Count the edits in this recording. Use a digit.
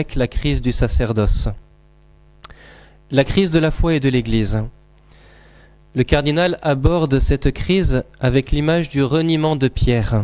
0